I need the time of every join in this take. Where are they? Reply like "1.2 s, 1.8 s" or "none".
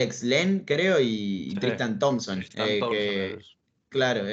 none